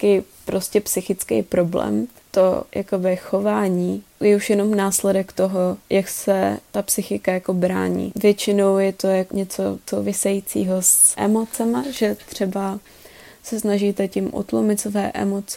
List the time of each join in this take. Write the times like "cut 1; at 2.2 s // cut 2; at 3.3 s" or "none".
cut 1; at 11.1 s